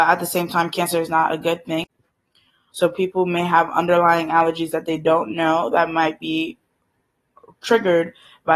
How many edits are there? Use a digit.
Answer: 1